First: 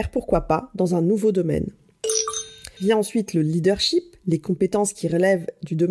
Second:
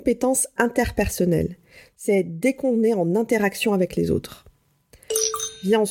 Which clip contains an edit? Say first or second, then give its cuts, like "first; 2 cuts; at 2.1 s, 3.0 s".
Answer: first; 1 cut; at 2.8 s